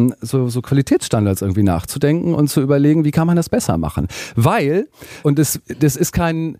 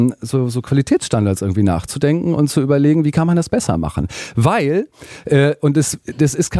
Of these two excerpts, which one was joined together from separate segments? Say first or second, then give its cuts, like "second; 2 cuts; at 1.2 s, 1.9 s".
first; 1 cut; at 5.2 s